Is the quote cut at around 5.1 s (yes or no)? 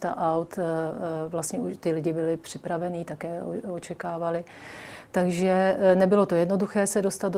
no